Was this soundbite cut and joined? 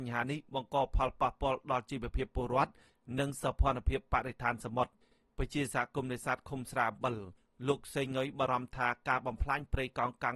no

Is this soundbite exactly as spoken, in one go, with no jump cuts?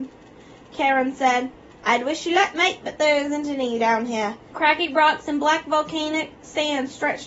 no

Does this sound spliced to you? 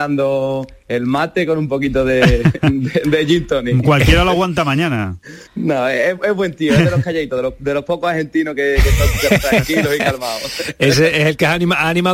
yes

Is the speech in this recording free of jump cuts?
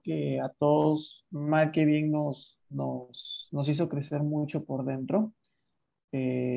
yes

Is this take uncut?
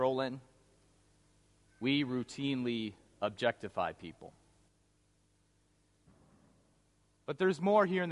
yes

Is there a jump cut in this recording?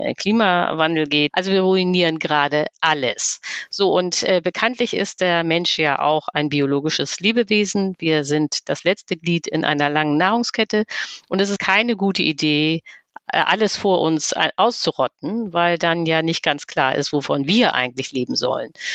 yes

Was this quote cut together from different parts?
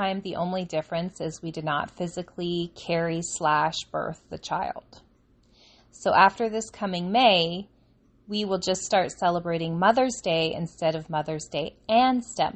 yes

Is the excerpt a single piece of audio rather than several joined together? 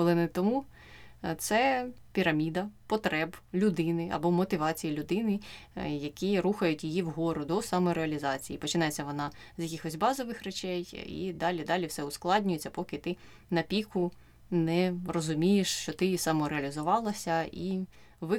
yes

